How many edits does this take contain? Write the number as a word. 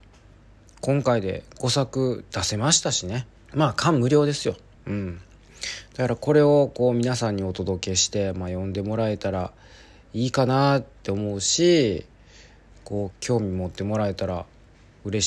three